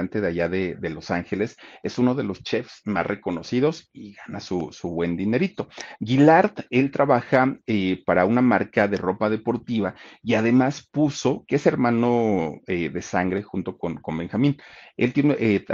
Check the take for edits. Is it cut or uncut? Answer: cut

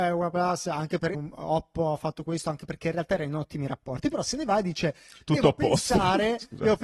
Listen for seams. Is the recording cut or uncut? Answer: cut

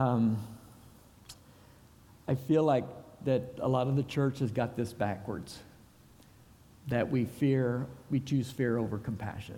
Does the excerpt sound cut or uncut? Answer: uncut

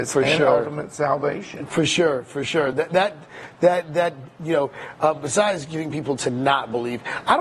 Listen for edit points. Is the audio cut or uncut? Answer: uncut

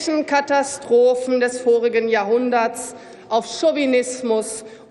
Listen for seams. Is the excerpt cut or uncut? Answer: uncut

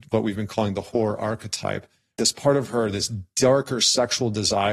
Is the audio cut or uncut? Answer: uncut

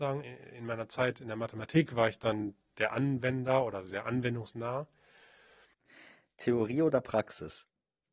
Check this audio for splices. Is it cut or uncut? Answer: cut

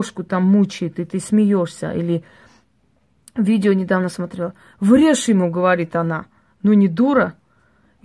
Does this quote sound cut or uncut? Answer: uncut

